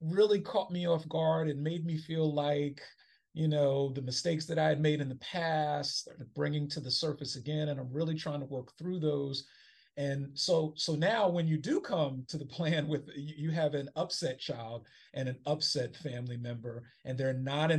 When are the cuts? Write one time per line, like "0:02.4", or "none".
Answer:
none